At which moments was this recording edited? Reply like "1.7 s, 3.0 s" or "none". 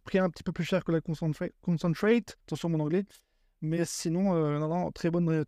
2.4 s